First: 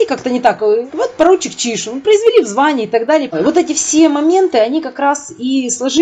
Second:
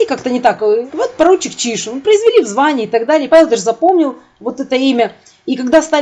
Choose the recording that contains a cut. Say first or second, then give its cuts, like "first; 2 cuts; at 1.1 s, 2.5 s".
first; 1 cut; at 3.3 s